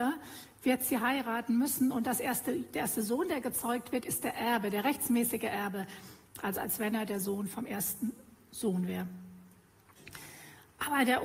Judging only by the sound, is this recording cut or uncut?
uncut